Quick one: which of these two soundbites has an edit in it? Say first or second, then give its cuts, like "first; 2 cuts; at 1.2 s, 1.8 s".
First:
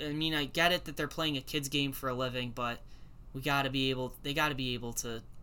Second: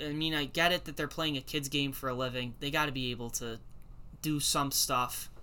second; 1 cut; at 2.5 s